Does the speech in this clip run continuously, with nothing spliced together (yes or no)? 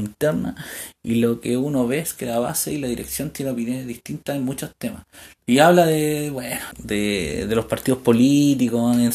no